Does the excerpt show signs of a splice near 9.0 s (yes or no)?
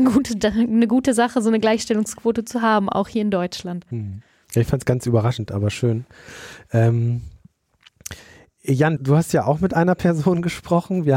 yes